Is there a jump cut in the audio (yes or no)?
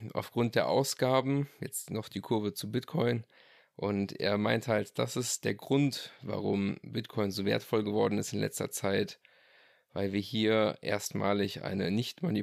no